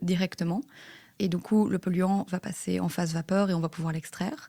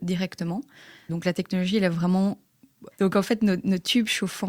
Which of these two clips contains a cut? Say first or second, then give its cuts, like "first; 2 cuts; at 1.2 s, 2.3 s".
second; 2 cuts; at 1.1 s, 2.9 s